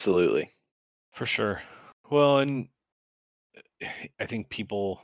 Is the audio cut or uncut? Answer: cut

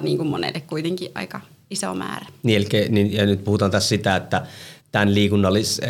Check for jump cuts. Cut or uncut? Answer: cut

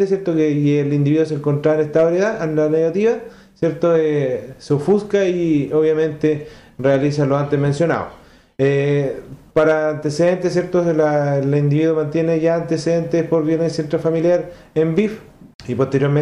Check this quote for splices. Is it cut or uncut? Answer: uncut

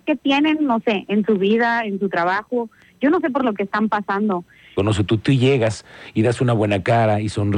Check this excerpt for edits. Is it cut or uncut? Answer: cut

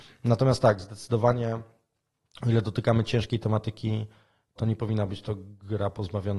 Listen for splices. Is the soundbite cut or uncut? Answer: cut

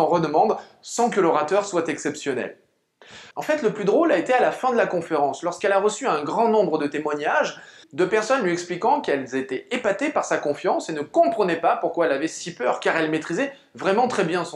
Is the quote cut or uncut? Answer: cut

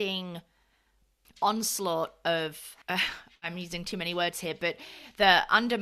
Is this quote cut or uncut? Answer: cut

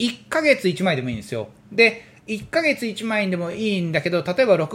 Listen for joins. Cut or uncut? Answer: uncut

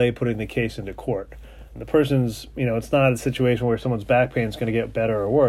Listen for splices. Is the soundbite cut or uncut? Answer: cut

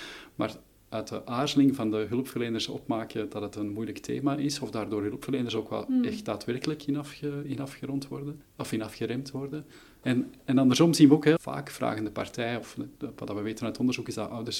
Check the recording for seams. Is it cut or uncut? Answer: cut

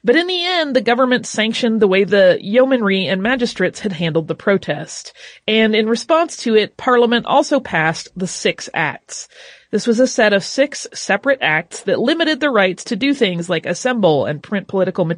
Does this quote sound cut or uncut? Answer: uncut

